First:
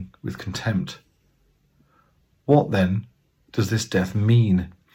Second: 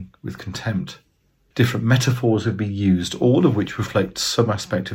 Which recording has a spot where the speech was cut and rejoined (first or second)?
second